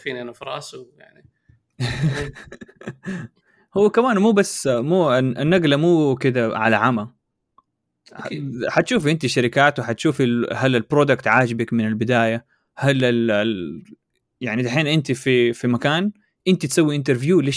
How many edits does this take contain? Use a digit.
0